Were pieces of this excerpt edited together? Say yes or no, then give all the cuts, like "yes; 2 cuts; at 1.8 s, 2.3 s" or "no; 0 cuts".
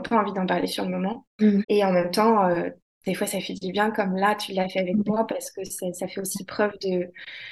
yes; 1 cut; at 1.6 s